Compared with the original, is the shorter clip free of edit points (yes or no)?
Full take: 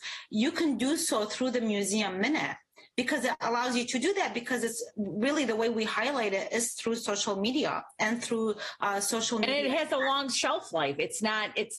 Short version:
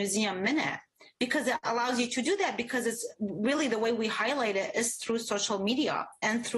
yes